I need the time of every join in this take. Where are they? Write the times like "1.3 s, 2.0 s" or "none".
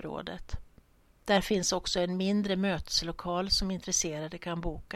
none